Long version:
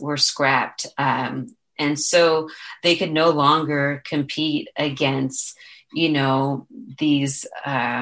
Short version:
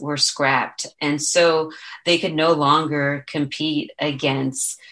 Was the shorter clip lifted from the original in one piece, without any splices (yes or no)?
no